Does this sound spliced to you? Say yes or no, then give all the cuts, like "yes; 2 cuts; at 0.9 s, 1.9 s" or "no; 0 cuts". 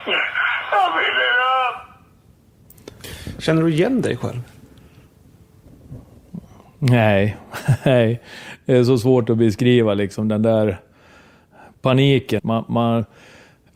yes; 1 cut; at 12.4 s